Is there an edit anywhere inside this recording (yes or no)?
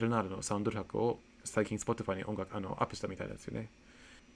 no